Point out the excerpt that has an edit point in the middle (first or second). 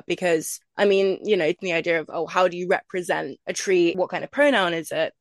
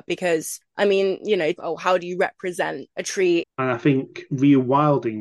second